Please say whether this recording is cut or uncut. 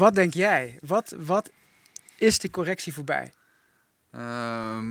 uncut